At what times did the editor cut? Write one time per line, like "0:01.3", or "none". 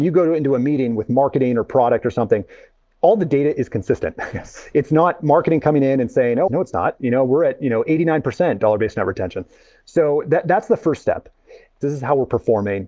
0:06.5
0:11.8